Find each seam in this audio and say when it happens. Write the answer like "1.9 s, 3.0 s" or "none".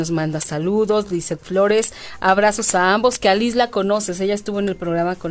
none